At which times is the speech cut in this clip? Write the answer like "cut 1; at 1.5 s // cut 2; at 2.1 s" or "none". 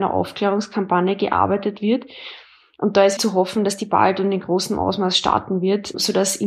cut 1; at 3.2 s